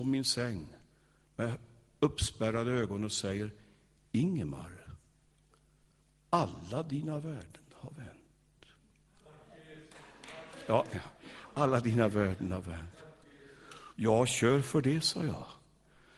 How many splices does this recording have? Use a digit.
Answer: 2